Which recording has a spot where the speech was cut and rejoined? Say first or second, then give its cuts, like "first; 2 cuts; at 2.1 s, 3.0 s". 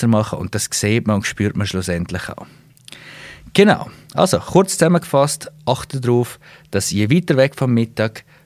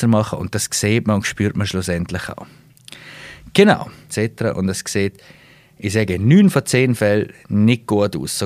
second; 1 cut; at 4.1 s